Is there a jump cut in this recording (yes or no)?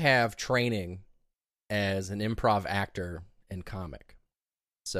no